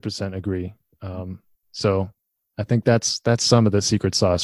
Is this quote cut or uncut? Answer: uncut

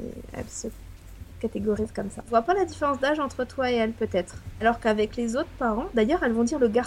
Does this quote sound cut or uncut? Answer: cut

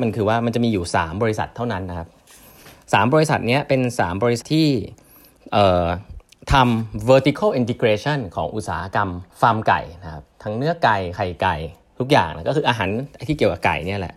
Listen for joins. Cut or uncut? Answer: cut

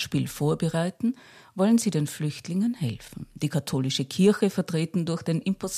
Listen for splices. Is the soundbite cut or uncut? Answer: uncut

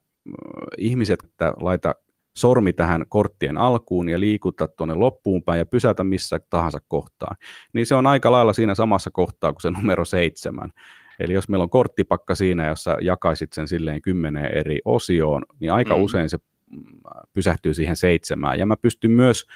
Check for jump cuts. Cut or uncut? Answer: cut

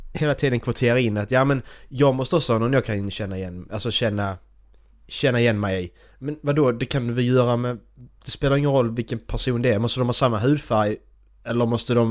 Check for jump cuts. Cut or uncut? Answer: uncut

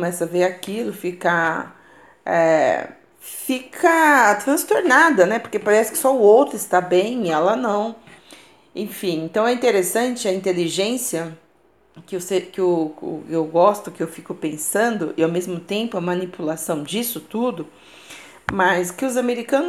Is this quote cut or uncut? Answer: uncut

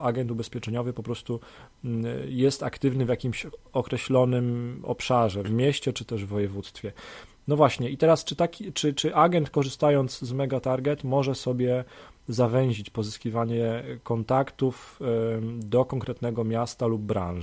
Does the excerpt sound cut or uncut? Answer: cut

